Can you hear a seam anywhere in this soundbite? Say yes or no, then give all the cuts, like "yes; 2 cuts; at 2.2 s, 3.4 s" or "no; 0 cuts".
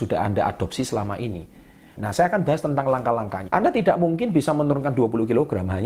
yes; 2 cuts; at 2.0 s, 3.5 s